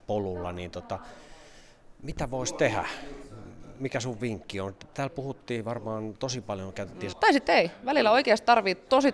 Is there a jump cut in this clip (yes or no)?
yes